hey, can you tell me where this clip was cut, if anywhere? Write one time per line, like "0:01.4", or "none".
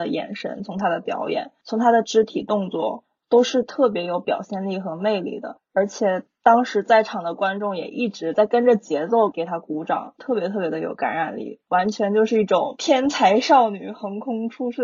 none